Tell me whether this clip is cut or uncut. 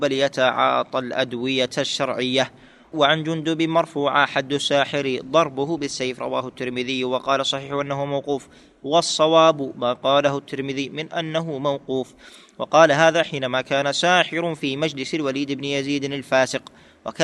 uncut